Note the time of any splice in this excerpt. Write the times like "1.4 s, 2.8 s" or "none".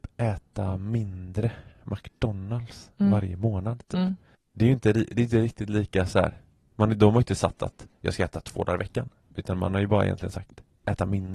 none